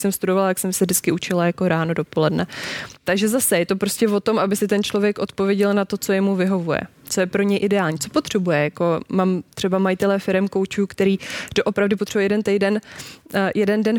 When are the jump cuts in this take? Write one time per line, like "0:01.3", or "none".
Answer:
none